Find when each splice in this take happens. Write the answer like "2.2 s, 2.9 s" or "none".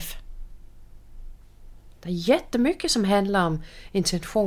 none

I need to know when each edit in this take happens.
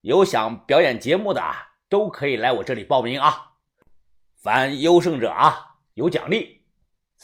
none

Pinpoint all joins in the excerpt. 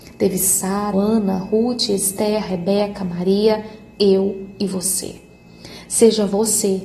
0.9 s

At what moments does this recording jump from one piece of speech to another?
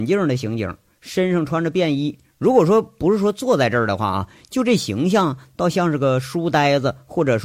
none

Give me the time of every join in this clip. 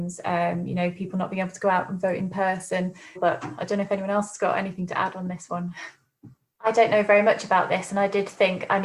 3.2 s, 6.5 s

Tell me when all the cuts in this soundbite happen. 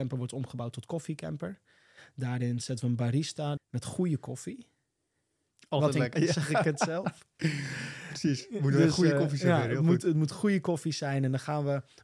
3.6 s, 6.1 s

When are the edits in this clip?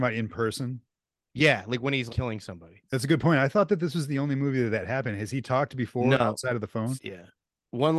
2.1 s, 7.0 s

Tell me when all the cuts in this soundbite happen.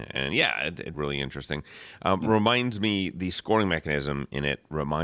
0.9 s

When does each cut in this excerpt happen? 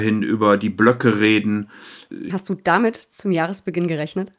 2.3 s

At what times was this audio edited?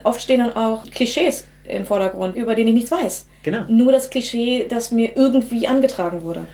2.3 s

